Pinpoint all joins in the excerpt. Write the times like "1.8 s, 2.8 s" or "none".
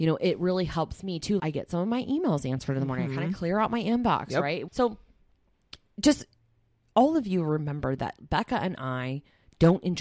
1.4 s, 4.7 s